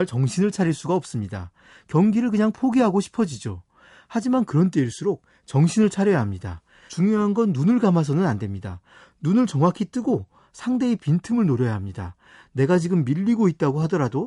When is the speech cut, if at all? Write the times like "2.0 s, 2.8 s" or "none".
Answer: 6.9 s